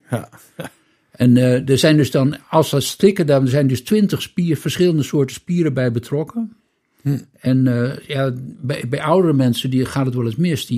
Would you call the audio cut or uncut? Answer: uncut